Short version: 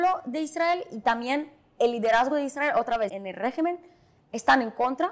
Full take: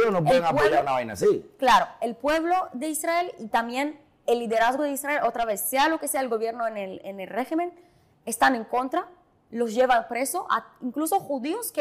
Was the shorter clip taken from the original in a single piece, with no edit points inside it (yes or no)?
no